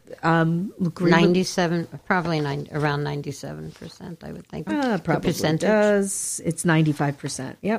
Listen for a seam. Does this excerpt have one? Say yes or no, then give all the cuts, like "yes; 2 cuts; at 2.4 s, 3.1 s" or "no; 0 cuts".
yes; 1 cut; at 4.7 s